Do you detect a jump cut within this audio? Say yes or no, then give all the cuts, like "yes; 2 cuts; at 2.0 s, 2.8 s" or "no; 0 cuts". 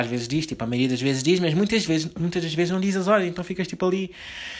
no; 0 cuts